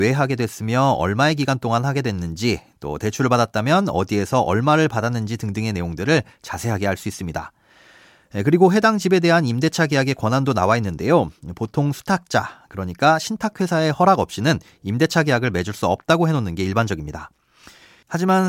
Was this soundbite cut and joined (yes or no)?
no